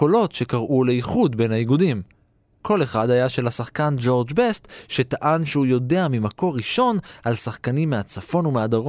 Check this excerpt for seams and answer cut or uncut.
uncut